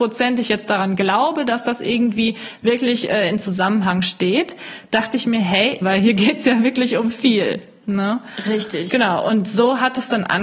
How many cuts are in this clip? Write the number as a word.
one